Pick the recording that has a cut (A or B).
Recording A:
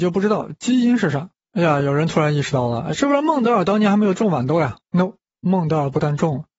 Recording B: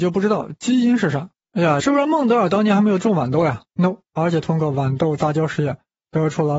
B